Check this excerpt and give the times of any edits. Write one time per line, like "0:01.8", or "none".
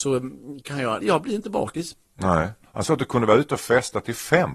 0:01.0
0:02.7